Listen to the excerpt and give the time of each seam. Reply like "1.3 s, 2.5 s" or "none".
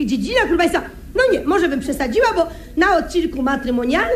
none